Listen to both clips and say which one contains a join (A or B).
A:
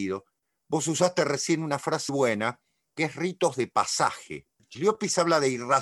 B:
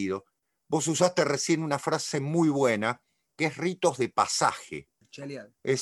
A